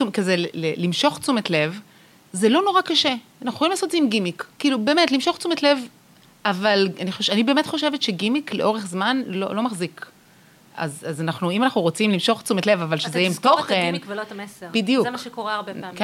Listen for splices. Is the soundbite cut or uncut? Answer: uncut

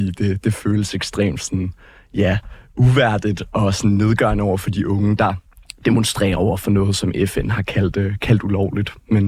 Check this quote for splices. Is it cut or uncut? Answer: uncut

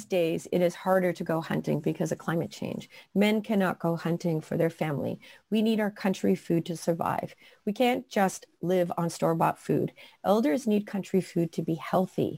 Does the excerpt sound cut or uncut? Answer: uncut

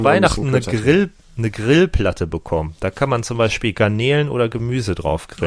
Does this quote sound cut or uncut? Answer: uncut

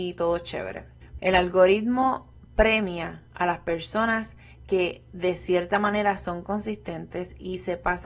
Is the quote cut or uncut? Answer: cut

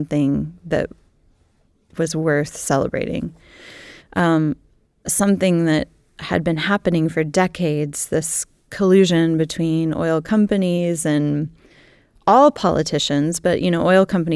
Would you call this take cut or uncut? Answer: cut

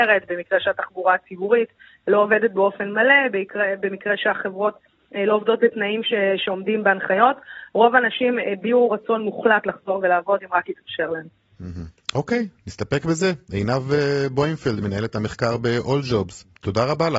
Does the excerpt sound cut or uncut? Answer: uncut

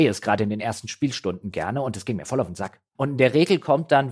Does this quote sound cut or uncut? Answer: cut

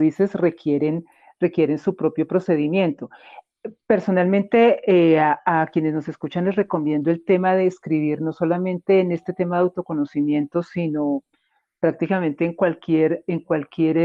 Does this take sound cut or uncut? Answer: uncut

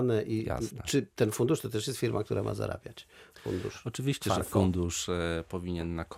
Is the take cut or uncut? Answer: uncut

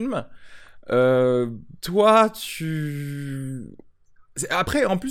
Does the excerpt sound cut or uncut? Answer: cut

